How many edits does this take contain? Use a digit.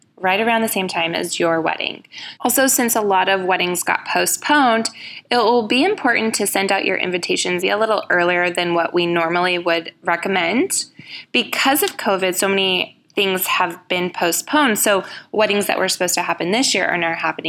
2